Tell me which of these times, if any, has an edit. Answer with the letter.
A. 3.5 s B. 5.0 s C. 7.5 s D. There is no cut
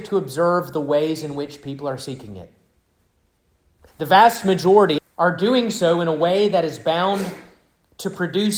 B